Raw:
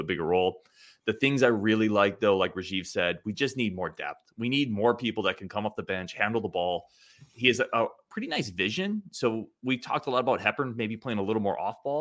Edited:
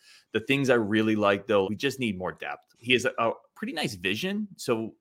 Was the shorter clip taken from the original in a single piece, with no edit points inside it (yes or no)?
no